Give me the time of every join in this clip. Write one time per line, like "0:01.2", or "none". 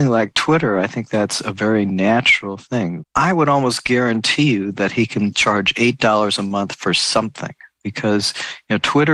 0:03.0